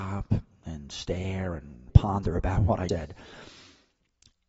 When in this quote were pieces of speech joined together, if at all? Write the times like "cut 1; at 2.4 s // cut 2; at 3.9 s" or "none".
cut 1; at 1.9 s // cut 2; at 2.9 s